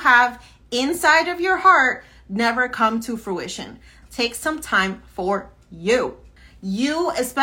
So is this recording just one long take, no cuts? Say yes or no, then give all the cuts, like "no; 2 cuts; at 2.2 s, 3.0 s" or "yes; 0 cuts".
no; 1 cut; at 4.0 s